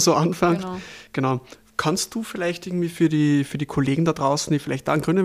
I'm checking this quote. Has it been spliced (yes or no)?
no